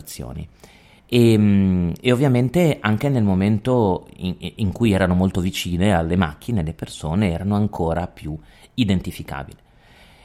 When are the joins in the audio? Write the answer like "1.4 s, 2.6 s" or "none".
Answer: 1.0 s